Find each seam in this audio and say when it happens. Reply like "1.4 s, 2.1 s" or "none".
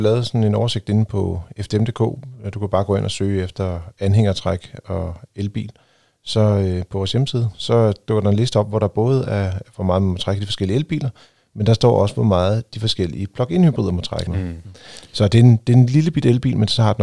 14.3 s